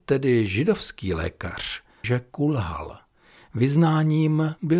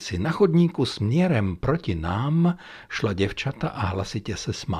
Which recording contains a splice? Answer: first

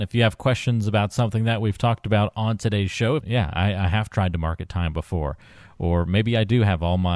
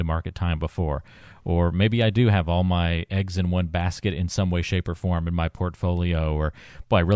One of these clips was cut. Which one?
first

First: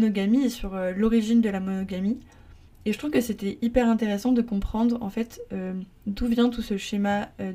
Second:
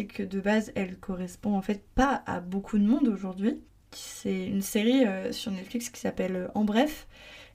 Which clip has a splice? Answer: second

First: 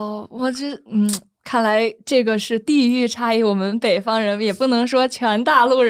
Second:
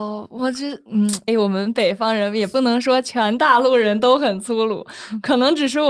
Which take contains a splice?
second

